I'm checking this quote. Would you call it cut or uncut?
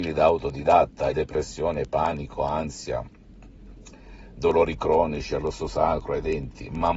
cut